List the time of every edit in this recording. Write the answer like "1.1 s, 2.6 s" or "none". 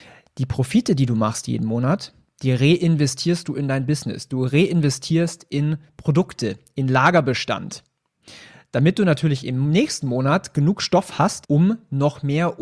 11.4 s

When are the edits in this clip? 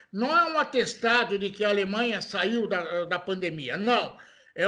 none

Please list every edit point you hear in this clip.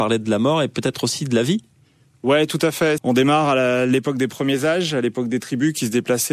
3.0 s

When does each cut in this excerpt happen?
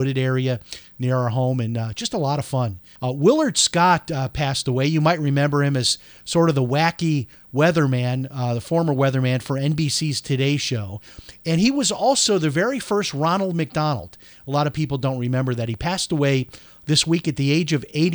3.0 s

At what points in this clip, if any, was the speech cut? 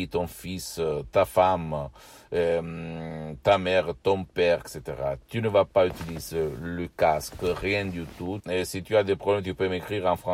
4.6 s, 8.4 s

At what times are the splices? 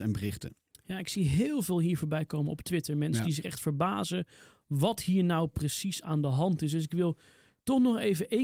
none

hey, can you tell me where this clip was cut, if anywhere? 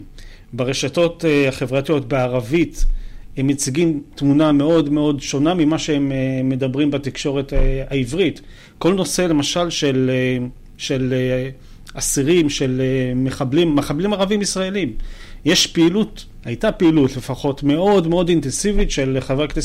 none

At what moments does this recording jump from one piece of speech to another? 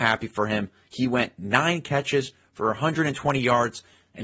none

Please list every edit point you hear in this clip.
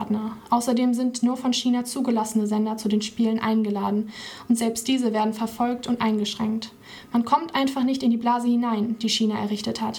none

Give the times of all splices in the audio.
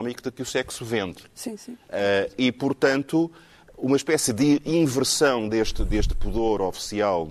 none

